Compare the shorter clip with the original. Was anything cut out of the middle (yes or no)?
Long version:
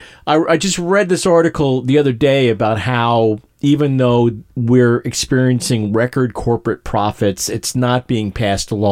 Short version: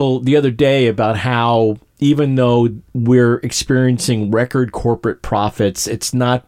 no